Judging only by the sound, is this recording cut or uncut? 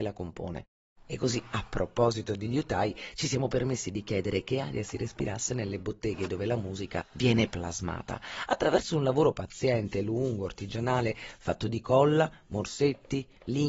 cut